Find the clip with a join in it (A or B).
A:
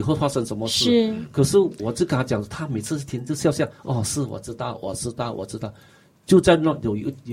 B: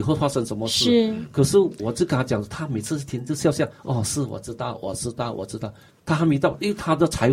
B